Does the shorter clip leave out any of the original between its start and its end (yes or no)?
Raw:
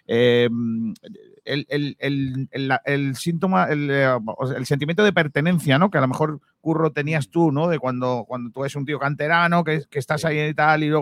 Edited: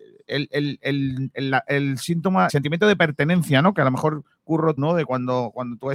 yes